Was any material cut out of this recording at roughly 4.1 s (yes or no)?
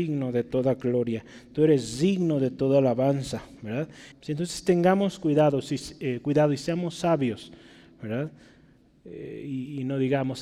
yes